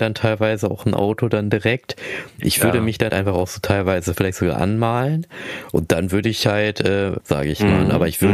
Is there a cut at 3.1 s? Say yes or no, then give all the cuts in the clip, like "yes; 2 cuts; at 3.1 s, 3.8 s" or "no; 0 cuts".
yes; 2 cuts; at 3.1 s, 7.2 s